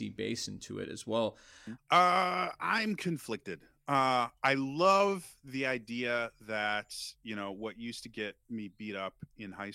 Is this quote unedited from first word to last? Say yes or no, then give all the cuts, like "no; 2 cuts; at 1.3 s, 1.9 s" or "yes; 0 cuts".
no; 1 cut; at 1.8 s